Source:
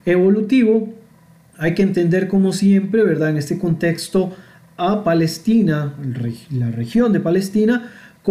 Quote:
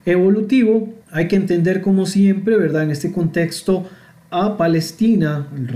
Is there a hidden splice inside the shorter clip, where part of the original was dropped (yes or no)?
yes